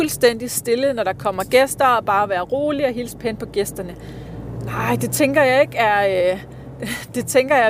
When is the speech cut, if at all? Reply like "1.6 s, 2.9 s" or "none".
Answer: none

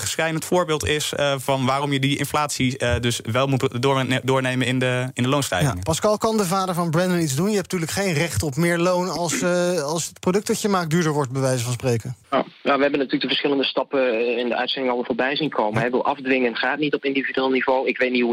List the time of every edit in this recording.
12.2 s

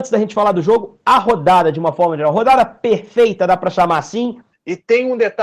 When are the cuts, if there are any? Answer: 4.5 s

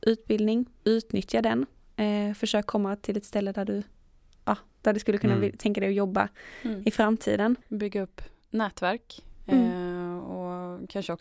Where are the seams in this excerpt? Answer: 7.6 s

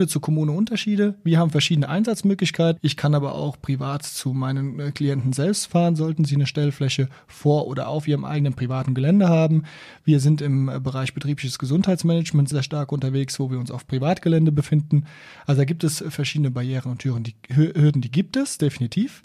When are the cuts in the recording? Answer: 2.8 s, 12.5 s

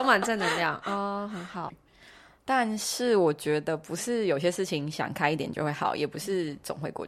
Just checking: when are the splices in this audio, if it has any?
1.7 s

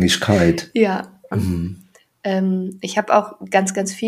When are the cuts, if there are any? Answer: 1.3 s

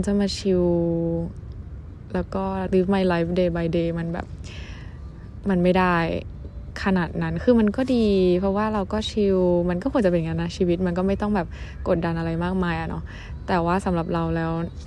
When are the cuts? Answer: 2.7 s

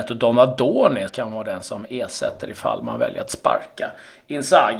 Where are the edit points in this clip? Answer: 1.1 s

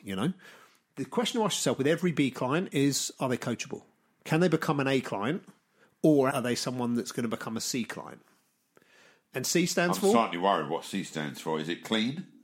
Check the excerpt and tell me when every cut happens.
6.3 s

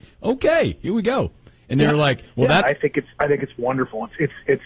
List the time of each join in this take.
2.6 s

